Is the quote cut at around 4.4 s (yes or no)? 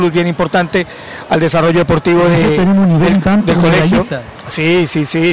no